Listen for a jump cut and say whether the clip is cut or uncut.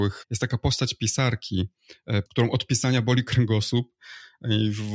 cut